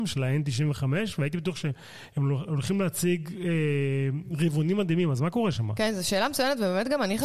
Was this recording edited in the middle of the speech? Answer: no; 0 cuts

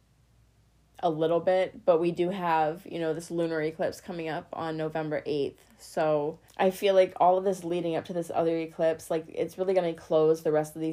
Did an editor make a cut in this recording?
yes; 1 cut; at 6.5 s

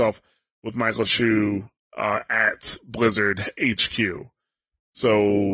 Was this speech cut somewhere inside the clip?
no; 0 cuts

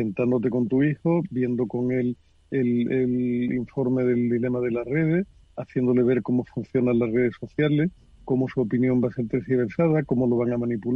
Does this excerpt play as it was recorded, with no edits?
yes; 0 cuts

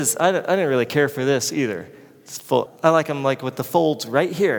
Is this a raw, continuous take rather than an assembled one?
no; 1 cut; at 2.7 s

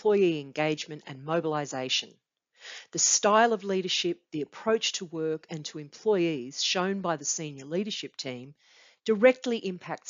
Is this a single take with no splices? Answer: yes; 0 cuts

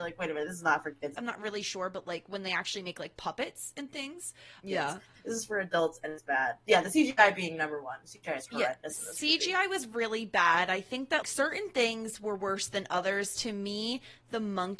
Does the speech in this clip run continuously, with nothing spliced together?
no; 3 cuts; at 1.2 s, 4.6 s, 11.2 s

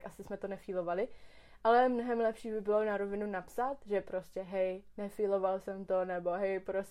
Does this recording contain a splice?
no; 0 cuts

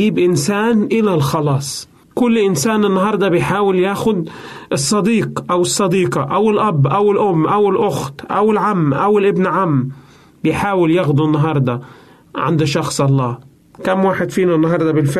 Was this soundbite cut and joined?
no; 0 cuts

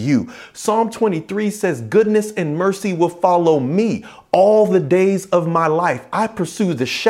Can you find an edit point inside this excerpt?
no; 0 cuts

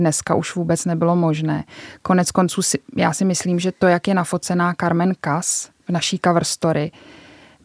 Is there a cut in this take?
yes; 1 cut; at 5.8 s

